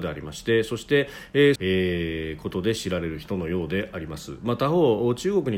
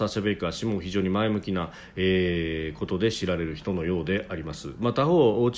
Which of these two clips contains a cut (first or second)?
first